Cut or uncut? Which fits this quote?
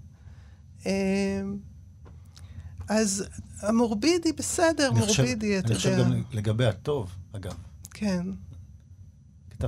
uncut